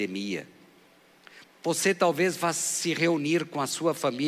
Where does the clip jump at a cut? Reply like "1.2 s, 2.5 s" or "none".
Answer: 1.4 s